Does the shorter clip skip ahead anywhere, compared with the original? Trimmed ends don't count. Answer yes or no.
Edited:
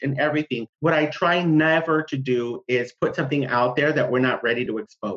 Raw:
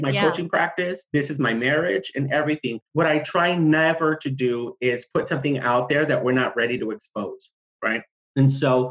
no